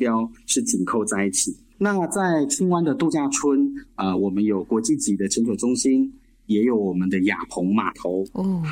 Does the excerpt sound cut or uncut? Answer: uncut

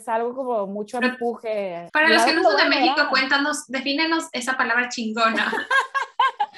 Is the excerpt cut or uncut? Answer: cut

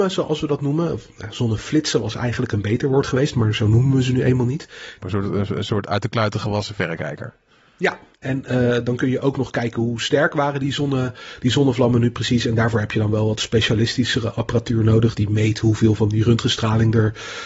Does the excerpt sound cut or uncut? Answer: cut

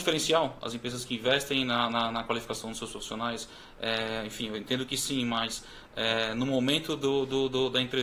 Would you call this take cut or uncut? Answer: uncut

